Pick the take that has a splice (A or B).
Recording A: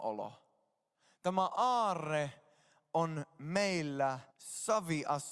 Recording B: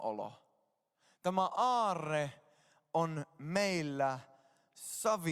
A